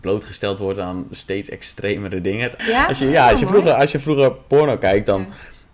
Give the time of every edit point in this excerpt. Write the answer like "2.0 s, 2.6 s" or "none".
2.6 s